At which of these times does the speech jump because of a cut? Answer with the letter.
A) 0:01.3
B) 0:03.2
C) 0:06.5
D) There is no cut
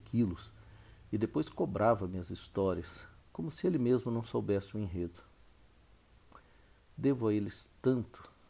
B